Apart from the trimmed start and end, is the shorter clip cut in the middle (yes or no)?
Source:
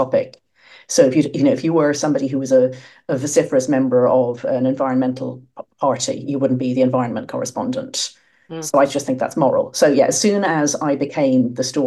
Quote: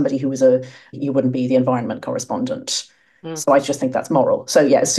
yes